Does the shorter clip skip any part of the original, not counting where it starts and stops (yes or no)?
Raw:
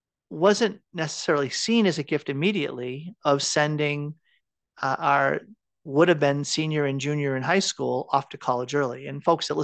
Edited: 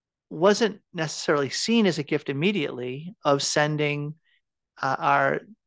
no